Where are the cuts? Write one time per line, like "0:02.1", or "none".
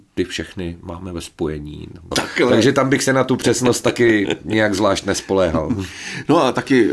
0:02.1